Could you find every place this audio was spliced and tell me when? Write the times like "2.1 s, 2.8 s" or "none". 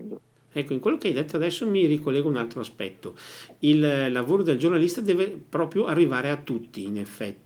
none